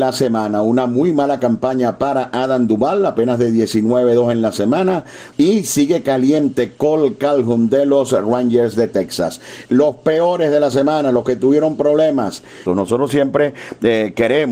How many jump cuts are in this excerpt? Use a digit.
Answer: 3